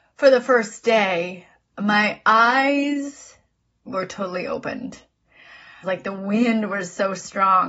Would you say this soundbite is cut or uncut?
cut